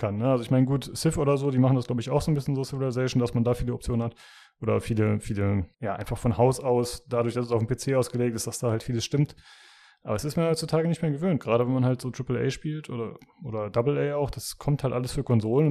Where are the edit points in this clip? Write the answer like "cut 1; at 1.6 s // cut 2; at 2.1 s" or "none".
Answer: cut 1; at 5.7 s